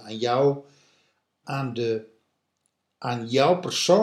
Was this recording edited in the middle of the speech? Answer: yes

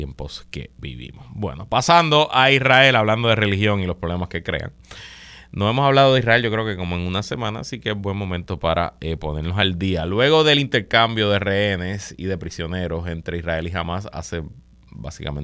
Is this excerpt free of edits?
yes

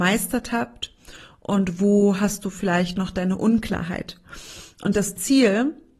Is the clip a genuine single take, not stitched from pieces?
yes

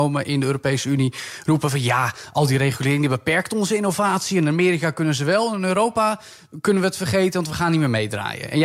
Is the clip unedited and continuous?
yes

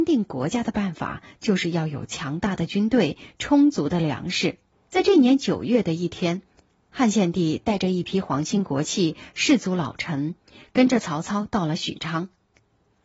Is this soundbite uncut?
no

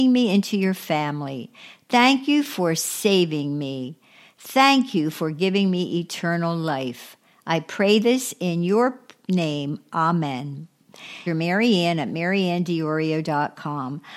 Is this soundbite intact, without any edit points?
no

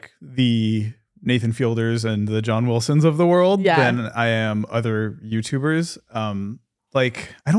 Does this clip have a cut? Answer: no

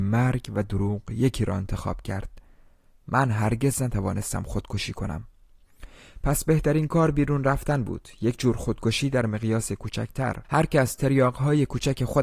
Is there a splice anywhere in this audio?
yes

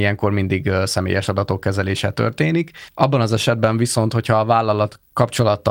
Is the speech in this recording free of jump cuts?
no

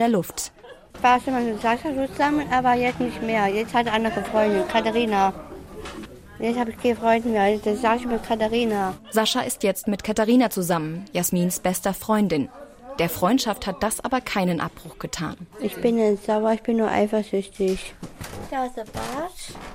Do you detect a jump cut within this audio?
yes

